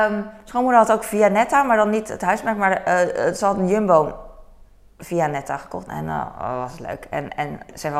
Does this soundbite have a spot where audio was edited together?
yes; 1 cut; at 5.9 s

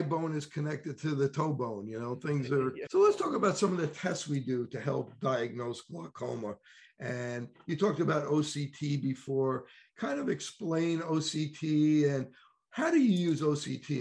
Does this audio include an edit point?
yes; 1 cut; at 2.9 s

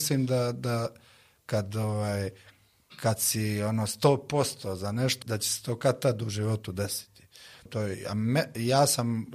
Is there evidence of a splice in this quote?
yes; 2 cuts; at 5.2 s, 7.7 s

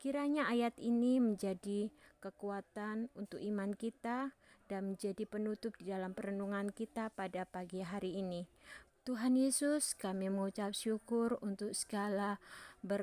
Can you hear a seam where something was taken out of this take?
yes; 1 cut; at 8.9 s

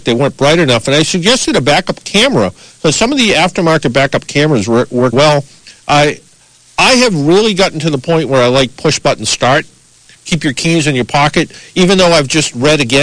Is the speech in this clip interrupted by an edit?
yes; 1 cut; at 5.1 s

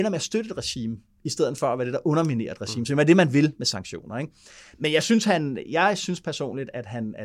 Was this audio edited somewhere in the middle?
no; 0 cuts

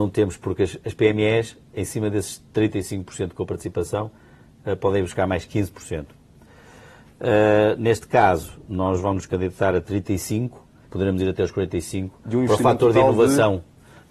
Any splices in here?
yes; 1 cut; at 10.9 s

